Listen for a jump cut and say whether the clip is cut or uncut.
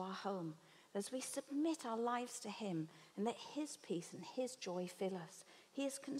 uncut